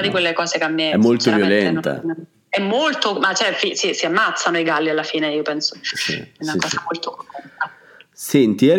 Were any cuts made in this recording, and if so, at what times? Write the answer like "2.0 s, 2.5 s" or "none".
none